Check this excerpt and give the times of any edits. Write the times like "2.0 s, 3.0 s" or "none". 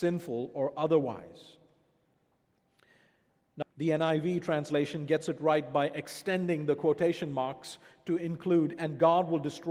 3.6 s